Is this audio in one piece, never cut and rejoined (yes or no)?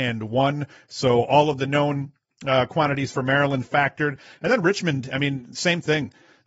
yes